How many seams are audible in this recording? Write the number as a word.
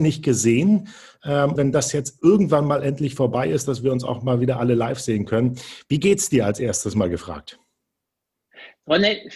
one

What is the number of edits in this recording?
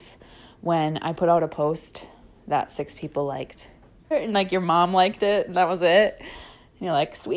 one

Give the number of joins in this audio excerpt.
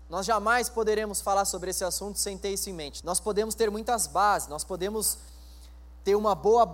one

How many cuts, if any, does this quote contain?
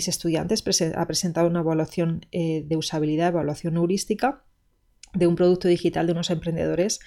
zero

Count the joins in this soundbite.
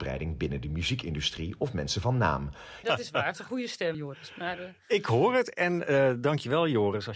two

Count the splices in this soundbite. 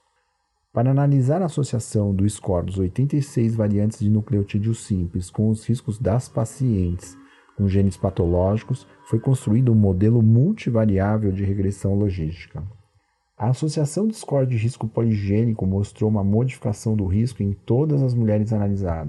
zero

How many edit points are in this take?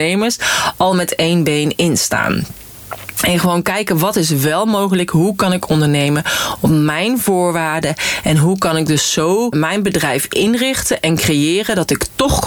one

